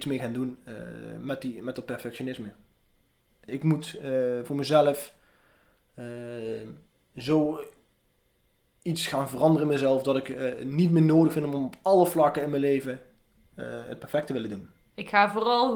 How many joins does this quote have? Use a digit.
1